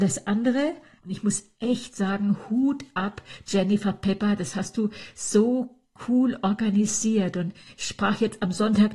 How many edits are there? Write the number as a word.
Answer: one